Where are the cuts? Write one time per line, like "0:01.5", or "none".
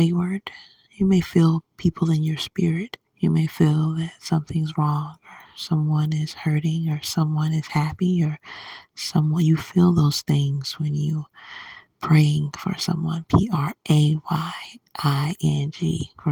0:03.1